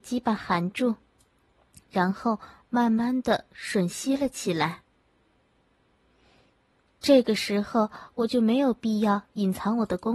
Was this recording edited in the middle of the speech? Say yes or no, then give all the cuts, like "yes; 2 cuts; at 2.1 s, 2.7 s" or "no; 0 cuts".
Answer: no; 0 cuts